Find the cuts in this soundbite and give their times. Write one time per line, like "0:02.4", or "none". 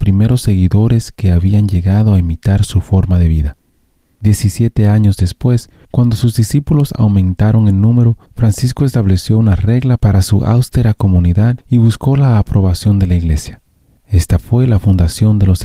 none